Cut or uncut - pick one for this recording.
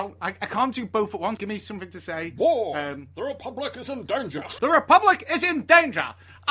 cut